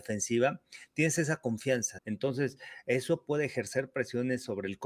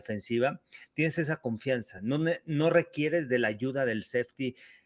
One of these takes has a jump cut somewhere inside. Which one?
first; 1 cut; at 2.0 s

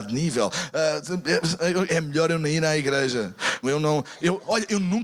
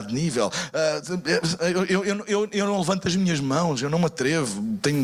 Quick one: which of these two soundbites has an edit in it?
first; 2 cuts; at 1.9 s, 3.6 s

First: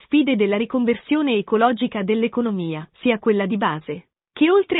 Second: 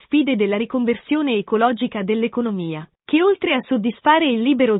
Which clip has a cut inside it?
second; 1 cut; at 2.9 s

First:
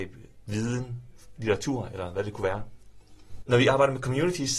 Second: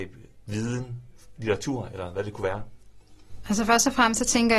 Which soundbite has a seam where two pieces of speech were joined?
first; 1 cut; at 3.4 s

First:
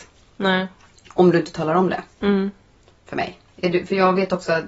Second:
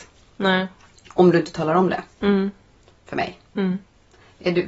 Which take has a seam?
first; 1 cut; at 3.5 s

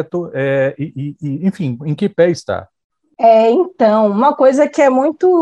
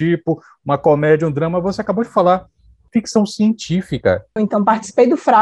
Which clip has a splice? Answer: second; 1 cut; at 4.4 s

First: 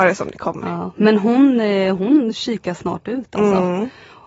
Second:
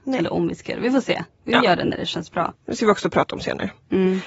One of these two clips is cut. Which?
second; 1 cut; at 2.5 s

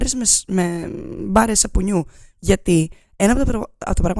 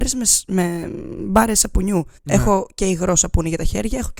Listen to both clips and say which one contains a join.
second; 1 cut; at 2.2 s

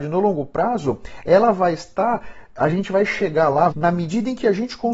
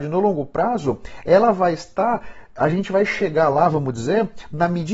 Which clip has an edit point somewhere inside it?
first; 1 cut; at 3.7 s

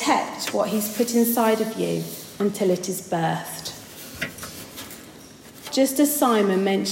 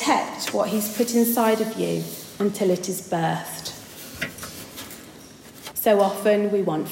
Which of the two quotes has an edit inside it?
second; 1 cut; at 5.7 s

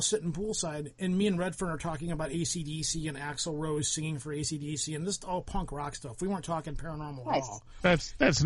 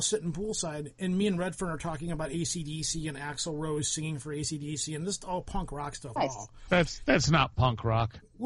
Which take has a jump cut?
second; 1 cut; at 6.2 s

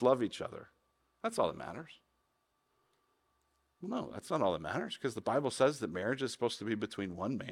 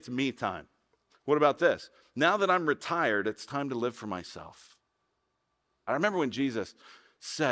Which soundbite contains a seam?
second; 2 cuts; at 1.1 s, 5.9 s

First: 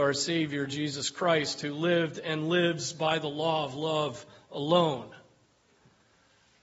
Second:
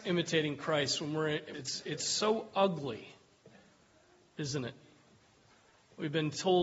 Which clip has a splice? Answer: second; 1 cut; at 1.5 s

